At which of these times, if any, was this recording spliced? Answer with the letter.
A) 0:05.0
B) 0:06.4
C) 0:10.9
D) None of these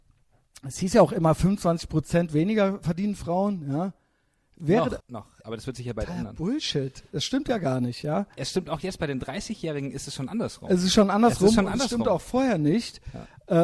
A